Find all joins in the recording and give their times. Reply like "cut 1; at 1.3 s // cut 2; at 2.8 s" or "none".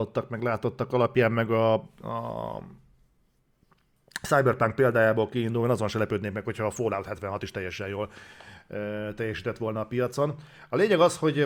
none